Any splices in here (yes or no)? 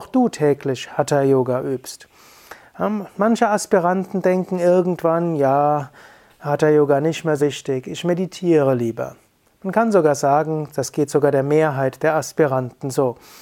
yes